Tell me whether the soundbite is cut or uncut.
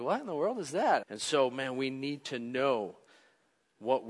cut